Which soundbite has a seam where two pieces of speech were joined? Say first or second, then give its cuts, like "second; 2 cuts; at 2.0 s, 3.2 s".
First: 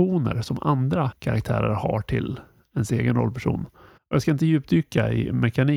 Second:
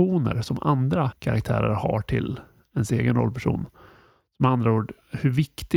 first; 1 cut; at 4.0 s